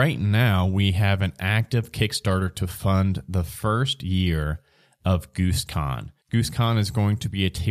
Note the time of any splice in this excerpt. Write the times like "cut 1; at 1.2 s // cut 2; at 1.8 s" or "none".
cut 1; at 6.2 s